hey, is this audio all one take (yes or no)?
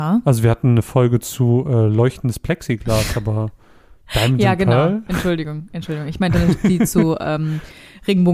yes